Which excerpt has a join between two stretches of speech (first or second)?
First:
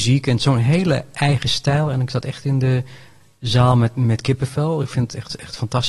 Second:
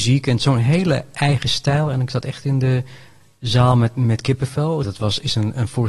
second